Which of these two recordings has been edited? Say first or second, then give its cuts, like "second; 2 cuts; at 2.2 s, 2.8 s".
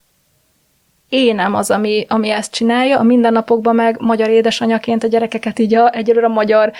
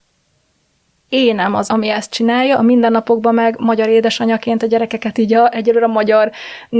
second; 1 cut; at 1.7 s